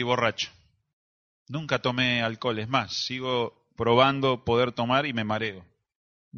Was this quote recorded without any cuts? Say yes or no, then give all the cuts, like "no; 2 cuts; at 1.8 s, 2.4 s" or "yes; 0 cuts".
yes; 0 cuts